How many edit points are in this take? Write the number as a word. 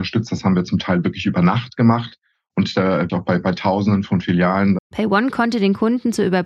two